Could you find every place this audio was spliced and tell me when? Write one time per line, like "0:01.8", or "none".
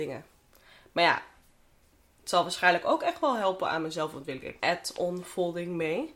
0:02.1
0:04.6